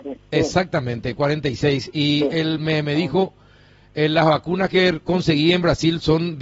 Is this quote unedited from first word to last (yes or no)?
yes